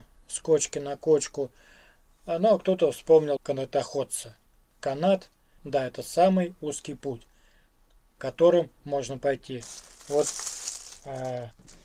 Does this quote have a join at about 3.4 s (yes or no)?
yes